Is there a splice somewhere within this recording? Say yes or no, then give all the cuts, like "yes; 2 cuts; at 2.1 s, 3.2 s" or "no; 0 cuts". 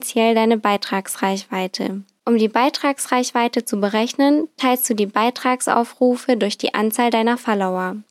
no; 0 cuts